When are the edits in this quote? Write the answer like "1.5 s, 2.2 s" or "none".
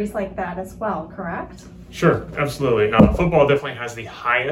none